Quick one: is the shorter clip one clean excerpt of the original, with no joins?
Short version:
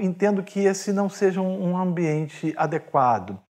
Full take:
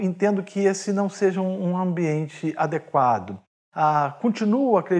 yes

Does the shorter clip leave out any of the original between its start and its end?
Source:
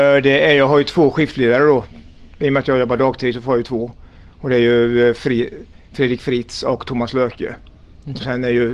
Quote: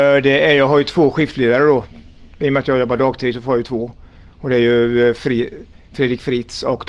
no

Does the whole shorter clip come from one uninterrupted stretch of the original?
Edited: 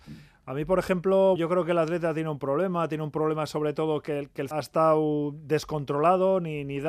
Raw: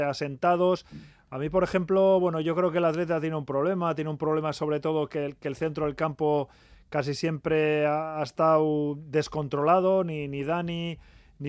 no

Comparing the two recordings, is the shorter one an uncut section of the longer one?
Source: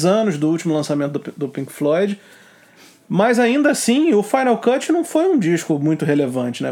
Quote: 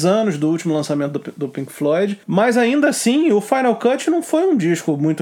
no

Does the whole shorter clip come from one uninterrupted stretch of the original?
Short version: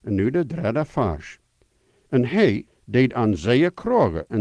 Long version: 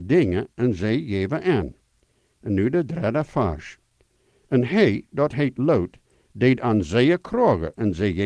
no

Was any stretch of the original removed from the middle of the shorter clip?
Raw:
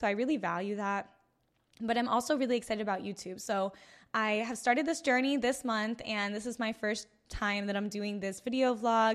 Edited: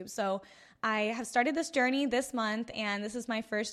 no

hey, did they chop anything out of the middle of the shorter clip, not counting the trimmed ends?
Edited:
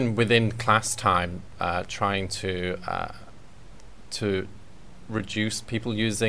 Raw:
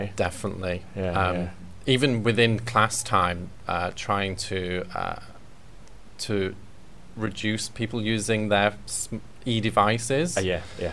no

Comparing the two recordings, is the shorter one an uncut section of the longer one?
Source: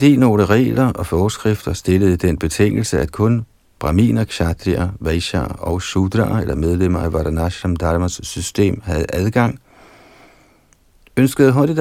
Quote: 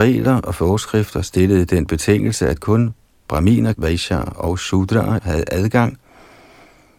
no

